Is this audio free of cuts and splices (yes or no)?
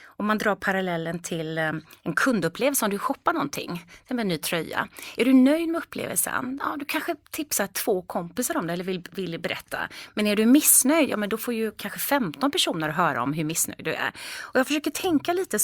yes